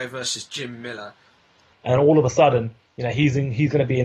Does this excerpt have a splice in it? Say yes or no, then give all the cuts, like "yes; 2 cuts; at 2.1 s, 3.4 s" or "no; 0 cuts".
yes; 1 cut; at 1.7 s